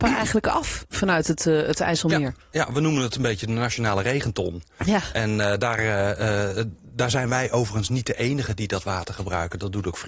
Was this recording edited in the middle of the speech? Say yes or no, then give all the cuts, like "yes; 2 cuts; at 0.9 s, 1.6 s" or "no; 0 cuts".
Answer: no; 0 cuts